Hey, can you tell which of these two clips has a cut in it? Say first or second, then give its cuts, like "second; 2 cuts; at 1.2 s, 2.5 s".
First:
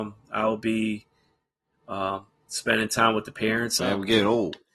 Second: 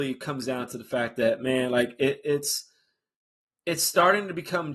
first; 1 cut; at 3.8 s